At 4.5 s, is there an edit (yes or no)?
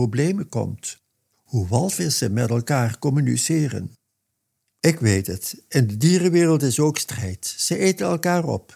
no